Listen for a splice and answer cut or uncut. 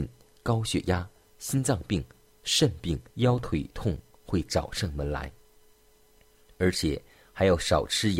cut